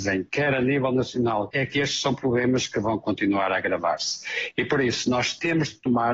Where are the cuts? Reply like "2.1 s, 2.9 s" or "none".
1.5 s